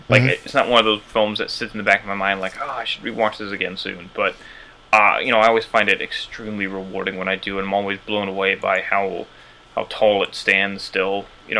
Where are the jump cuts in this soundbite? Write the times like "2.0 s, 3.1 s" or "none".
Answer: none

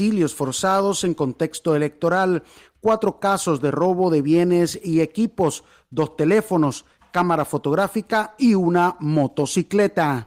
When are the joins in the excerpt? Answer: none

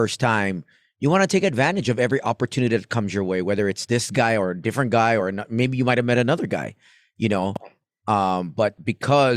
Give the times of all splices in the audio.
none

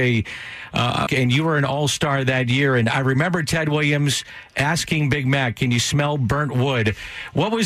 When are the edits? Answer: 1.1 s

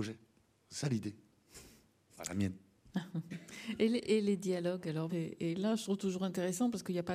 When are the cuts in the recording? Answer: 5.1 s

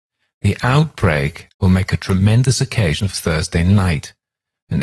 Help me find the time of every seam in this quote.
1.5 s

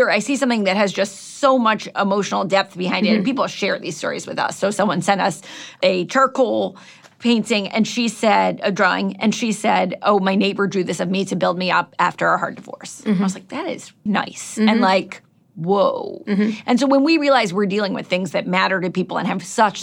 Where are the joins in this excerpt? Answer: 14.1 s

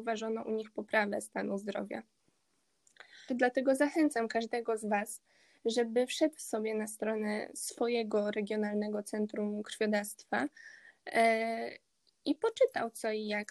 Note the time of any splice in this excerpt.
3.3 s

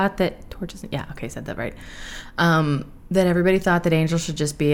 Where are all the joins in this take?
none

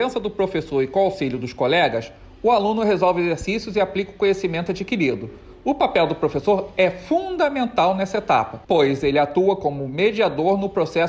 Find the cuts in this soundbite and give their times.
8.6 s

